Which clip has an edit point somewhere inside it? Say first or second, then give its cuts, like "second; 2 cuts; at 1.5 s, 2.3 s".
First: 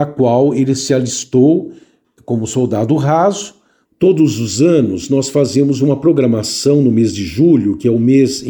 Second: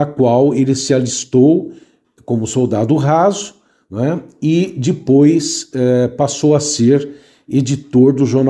first; 1 cut; at 3.9 s